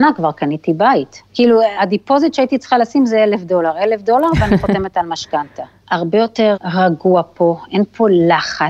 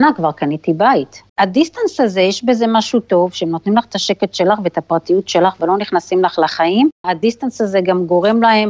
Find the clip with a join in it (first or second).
second